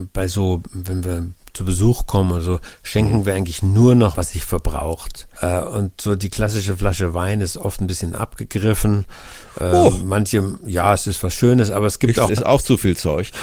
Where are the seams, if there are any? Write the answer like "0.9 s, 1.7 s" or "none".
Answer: 4.1 s, 5.4 s, 12.3 s